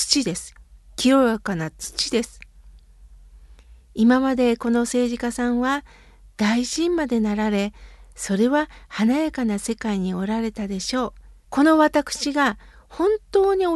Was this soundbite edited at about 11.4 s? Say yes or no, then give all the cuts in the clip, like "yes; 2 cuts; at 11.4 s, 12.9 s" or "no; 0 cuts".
yes; 1 cut; at 11.4 s